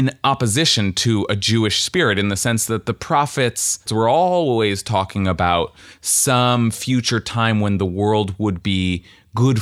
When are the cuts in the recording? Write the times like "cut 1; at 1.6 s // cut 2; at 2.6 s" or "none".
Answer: cut 1; at 3.9 s